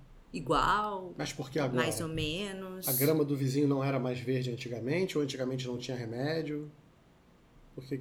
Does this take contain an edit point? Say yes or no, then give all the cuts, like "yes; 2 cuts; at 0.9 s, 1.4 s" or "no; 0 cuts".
no; 0 cuts